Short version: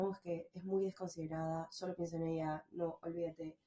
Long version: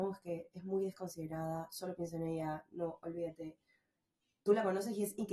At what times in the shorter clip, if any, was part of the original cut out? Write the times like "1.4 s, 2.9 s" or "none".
none